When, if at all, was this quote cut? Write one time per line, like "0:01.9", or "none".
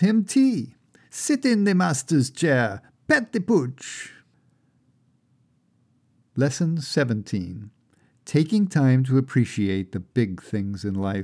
none

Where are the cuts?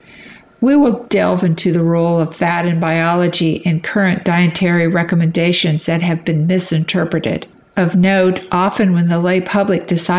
none

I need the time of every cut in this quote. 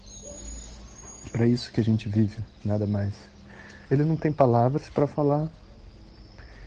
0:03.9

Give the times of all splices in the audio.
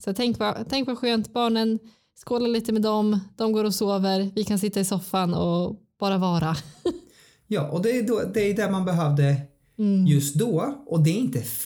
none

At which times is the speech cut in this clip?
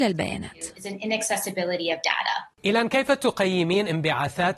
0:02.5

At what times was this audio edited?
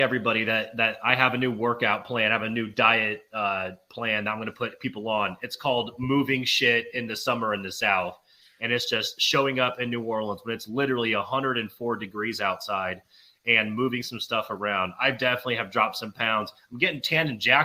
none

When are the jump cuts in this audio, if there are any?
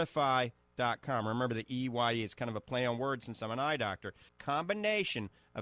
0:04.3

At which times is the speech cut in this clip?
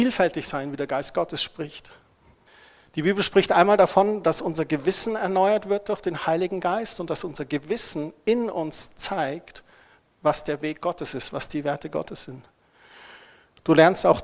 none

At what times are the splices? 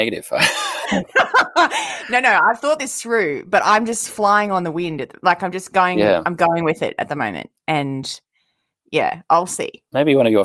none

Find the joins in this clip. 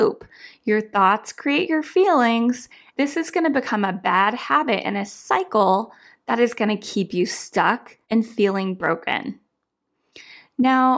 0:02.9
0:08.0

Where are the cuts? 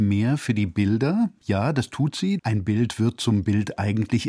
0:02.4

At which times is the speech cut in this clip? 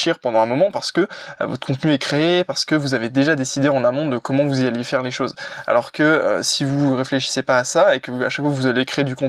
none

